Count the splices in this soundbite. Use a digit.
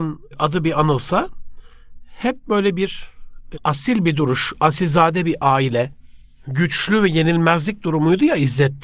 1